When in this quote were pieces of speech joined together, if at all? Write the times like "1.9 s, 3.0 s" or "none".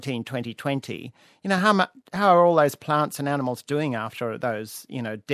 none